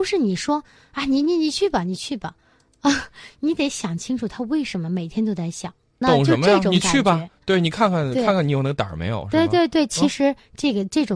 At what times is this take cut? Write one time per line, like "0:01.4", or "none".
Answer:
0:06.0